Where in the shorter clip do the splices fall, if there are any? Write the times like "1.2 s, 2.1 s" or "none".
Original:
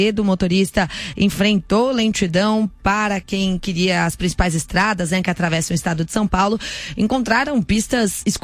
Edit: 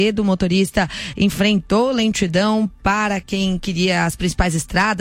none